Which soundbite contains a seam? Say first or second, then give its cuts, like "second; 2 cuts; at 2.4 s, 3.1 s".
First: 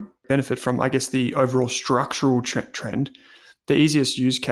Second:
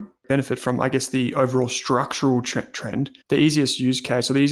second; 1 cut; at 3.2 s